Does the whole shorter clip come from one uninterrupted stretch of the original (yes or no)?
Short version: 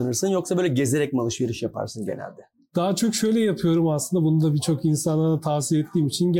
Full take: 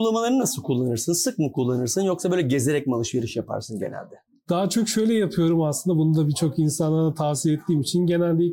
yes